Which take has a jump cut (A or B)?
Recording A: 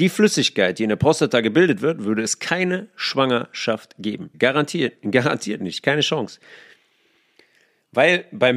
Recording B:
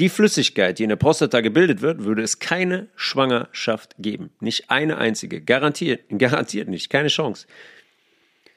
A